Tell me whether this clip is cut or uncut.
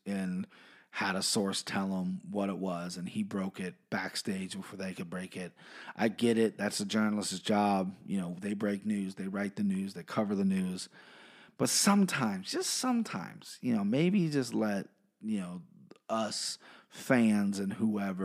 uncut